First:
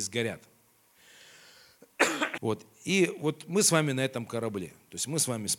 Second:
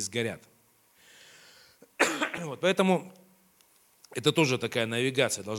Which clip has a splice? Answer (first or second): first